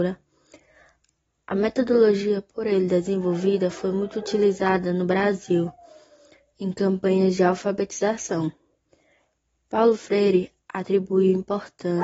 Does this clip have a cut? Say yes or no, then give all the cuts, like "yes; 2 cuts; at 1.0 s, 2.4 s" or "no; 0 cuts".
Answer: no; 0 cuts